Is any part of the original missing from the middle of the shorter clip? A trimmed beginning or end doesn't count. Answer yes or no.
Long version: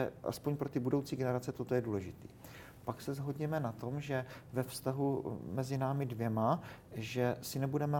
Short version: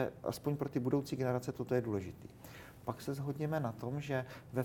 no